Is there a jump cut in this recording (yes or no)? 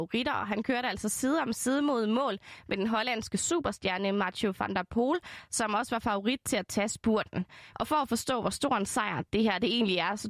yes